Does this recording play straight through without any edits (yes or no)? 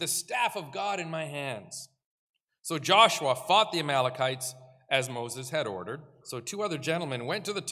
no